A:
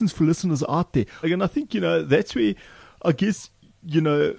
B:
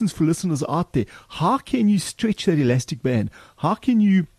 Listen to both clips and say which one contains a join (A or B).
A